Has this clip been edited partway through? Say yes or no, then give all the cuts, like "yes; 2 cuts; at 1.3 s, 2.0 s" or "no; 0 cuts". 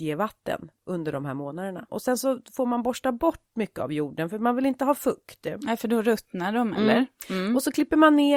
yes; 1 cut; at 1.9 s